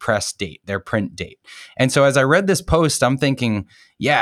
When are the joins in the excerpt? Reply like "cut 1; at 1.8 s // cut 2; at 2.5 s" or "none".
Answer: cut 1; at 1.7 s